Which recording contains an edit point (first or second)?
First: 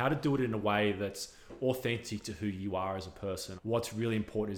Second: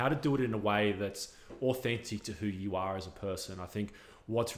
first